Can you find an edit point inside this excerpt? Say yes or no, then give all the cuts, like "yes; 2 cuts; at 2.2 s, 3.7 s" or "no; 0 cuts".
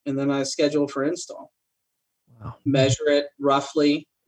yes; 1 cut; at 2.7 s